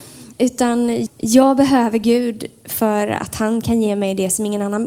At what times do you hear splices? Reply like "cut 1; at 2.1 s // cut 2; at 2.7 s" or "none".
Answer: cut 1; at 1.1 s